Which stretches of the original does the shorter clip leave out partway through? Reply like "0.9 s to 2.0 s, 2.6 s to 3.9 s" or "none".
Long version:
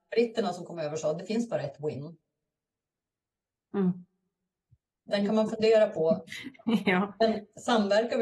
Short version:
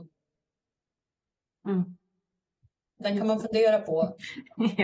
none